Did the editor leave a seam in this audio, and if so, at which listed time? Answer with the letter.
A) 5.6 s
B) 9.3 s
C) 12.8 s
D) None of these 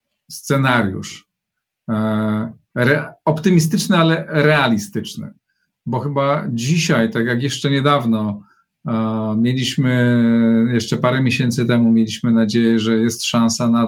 D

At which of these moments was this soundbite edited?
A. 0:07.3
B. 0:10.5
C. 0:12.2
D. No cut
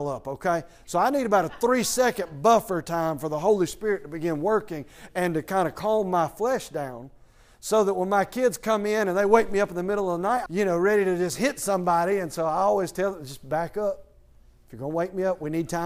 B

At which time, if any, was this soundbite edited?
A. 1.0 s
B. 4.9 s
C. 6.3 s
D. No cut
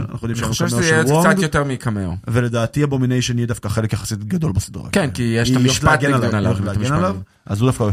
C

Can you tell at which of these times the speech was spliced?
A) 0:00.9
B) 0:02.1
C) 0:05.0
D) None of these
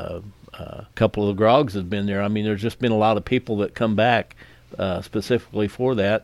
A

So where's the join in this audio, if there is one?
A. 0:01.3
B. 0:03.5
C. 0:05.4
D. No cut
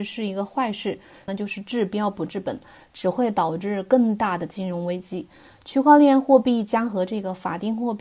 A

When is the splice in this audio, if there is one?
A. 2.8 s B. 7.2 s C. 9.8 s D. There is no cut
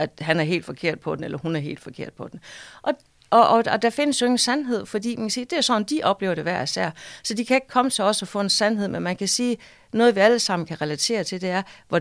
D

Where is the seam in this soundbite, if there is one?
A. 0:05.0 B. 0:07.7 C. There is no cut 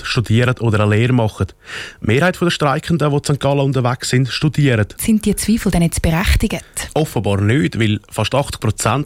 A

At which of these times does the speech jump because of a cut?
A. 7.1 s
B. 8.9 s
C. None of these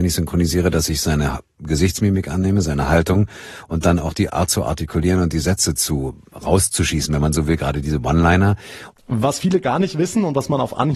B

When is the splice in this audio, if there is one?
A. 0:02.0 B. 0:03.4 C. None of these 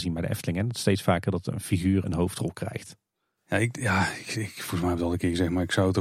A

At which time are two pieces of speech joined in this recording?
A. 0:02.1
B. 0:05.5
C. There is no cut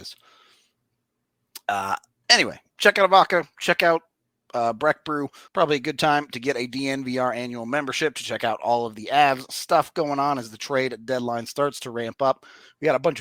B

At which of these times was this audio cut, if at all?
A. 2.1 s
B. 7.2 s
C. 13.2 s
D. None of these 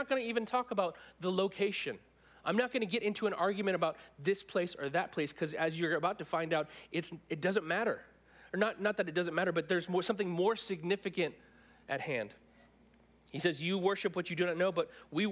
D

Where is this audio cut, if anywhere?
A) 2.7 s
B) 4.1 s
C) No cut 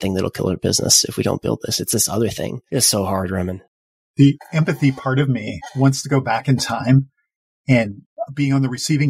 A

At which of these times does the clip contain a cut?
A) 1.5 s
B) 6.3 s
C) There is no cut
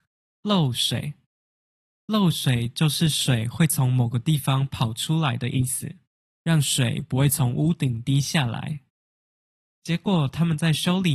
B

